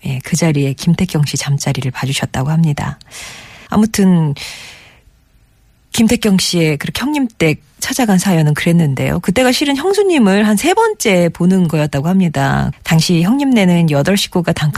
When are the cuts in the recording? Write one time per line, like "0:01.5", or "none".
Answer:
0:03.7
0:12.7